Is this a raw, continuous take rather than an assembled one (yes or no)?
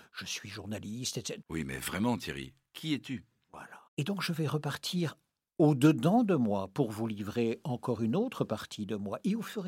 no